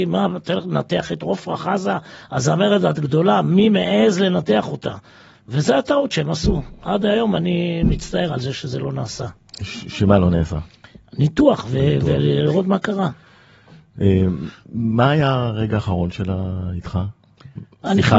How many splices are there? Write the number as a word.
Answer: zero